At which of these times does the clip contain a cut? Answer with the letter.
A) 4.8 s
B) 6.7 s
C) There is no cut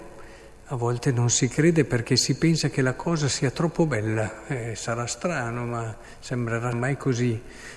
B